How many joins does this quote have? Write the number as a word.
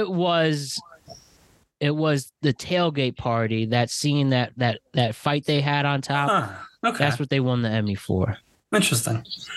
zero